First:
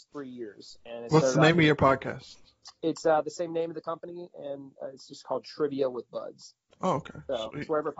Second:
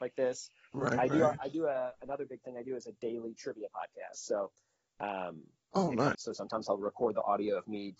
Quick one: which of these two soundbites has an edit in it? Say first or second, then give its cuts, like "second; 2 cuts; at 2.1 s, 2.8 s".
second; 1 cut; at 6.1 s